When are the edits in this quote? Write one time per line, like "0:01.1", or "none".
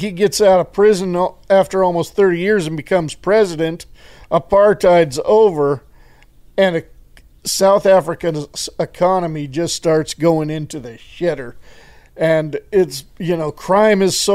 none